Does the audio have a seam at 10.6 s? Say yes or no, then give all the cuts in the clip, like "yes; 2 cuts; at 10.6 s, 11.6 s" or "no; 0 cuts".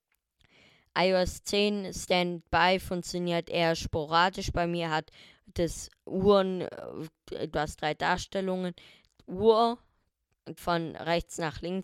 yes; 2 cuts; at 7.5 s, 10.6 s